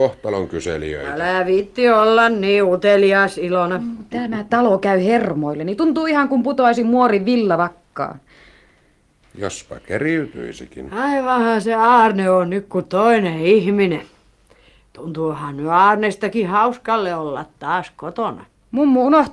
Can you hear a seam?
yes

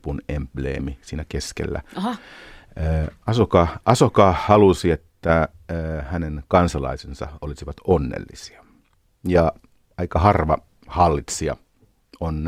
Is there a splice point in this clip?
no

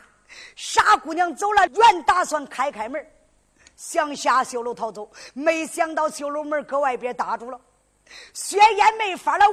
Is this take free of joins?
no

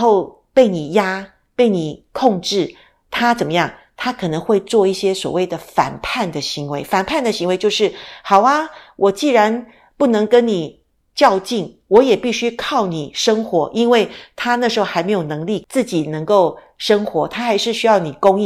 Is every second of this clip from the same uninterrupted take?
yes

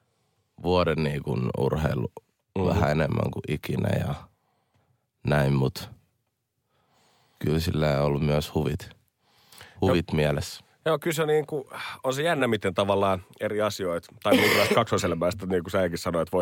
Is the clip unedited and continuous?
yes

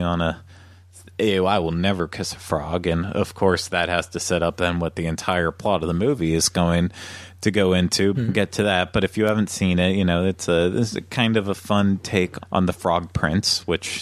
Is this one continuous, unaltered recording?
no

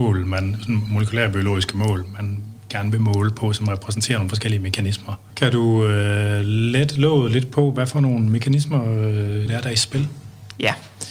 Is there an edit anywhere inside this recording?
yes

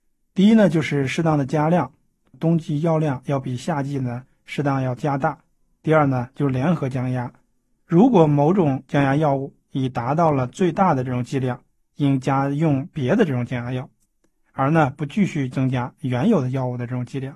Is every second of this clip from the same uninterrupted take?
no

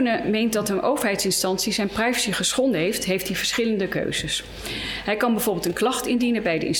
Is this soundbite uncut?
yes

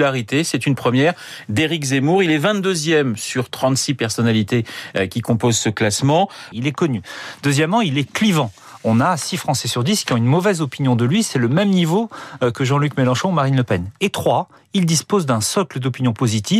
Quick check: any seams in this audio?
yes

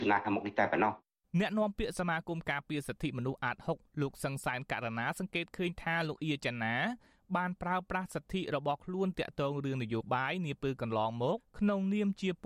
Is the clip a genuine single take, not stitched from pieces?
no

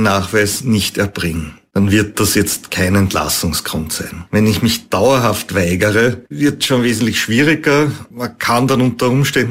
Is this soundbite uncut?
yes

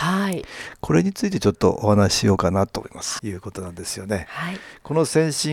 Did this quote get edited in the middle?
yes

